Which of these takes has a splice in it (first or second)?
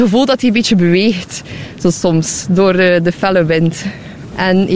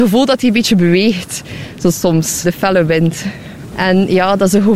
second